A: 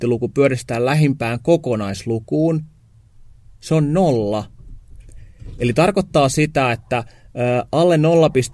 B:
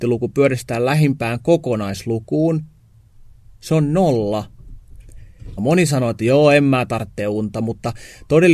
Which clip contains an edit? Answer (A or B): B